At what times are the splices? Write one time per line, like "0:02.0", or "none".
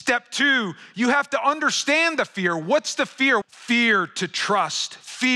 0:03.4